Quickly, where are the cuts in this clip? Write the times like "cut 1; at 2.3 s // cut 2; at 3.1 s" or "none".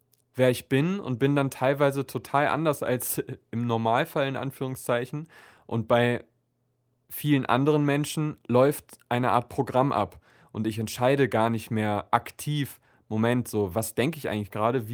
none